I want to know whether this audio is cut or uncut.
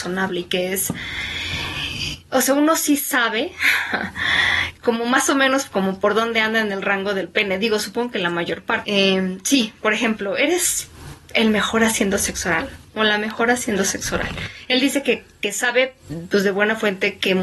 cut